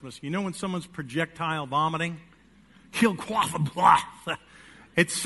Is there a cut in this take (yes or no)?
no